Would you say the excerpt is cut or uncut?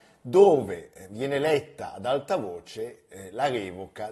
uncut